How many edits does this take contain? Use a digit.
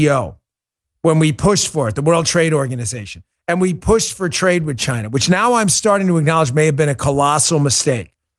0